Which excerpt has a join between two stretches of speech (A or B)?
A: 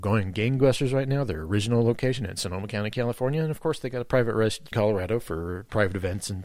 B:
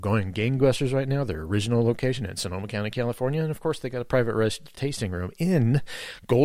A